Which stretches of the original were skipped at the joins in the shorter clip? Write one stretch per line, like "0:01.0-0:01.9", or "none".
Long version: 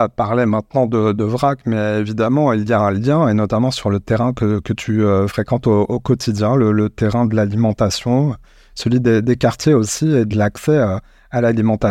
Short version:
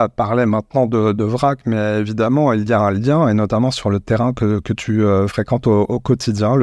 none